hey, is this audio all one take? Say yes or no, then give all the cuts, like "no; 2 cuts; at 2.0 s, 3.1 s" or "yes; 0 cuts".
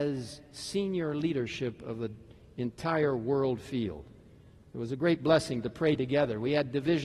yes; 0 cuts